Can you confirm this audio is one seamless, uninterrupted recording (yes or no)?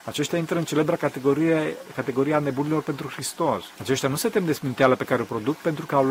no